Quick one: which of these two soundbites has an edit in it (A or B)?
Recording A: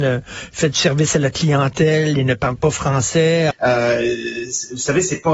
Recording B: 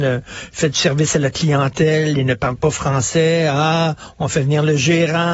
A